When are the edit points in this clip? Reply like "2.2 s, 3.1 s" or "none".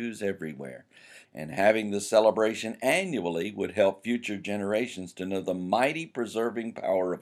1.2 s